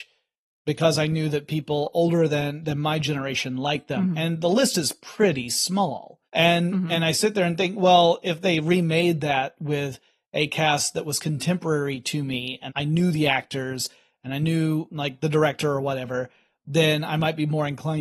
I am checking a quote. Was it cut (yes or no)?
yes